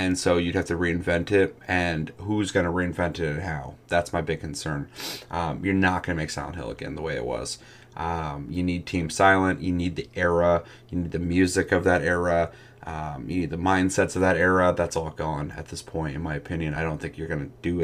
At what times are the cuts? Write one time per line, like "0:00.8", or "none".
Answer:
none